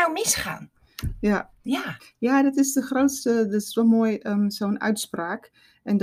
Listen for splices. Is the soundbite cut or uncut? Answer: uncut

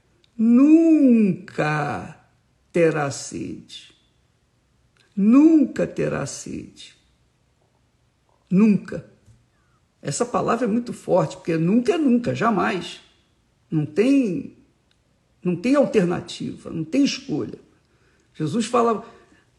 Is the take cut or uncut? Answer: uncut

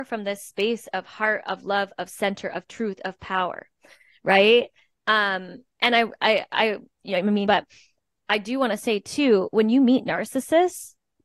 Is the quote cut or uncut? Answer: cut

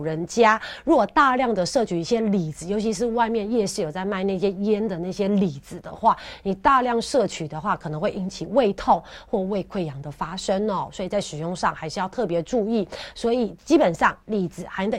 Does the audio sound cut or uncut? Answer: uncut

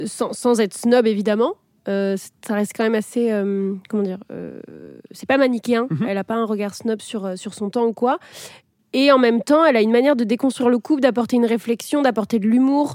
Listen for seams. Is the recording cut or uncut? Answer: uncut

